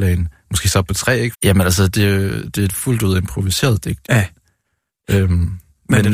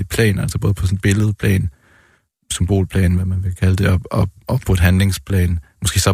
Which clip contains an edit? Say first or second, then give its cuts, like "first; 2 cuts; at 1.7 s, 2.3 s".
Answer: first; 2 cuts; at 1.3 s, 4.0 s